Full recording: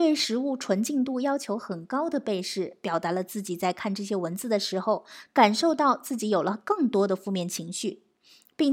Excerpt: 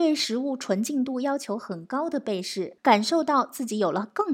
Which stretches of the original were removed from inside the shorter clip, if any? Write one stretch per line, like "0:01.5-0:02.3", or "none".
0:02.8-0:05.3